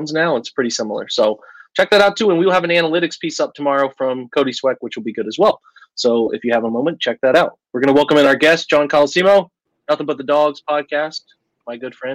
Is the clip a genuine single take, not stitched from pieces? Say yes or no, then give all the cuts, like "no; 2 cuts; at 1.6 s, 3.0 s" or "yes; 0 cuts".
yes; 0 cuts